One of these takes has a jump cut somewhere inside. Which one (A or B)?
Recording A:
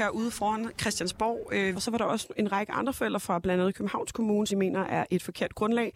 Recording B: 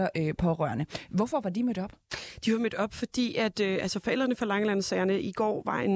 A